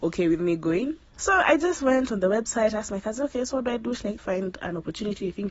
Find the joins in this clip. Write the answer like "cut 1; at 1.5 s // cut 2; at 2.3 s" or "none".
cut 1; at 1.1 s // cut 2; at 4.2 s